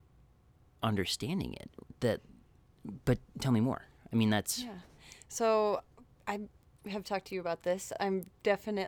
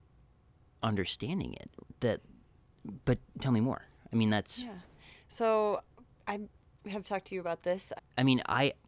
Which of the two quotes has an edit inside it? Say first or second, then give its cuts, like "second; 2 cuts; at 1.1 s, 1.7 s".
second; 1 cut; at 8.0 s